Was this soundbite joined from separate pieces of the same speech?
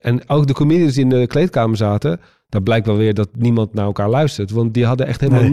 no; 0 cuts

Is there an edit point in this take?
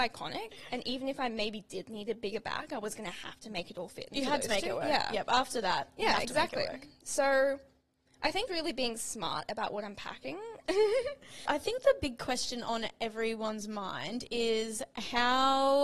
yes; 2 cuts; at 8.5 s, 10.7 s

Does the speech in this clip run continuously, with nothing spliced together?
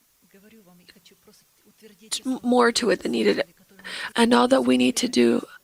no; 1 cut; at 4.1 s

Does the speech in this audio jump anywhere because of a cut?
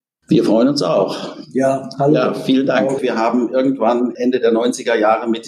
yes; 1 cut; at 3.0 s

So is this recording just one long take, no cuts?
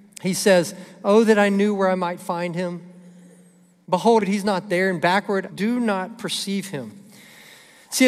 no; 2 cuts; at 4.2 s, 5.5 s

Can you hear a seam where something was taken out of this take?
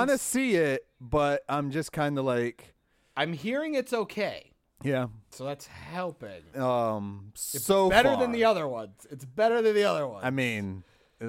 yes; 2 cuts; at 5.3 s, 6.5 s

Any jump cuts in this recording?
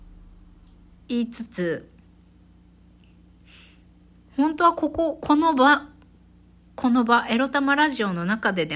no; 0 cuts

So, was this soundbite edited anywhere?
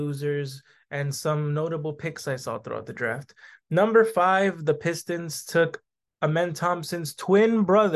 no; 0 cuts

